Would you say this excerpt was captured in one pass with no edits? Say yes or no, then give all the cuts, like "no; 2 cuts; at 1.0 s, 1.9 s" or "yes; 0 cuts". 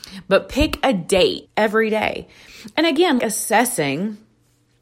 no; 2 cuts; at 1.4 s, 3.2 s